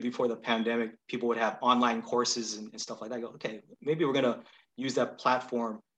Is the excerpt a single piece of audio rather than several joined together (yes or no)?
yes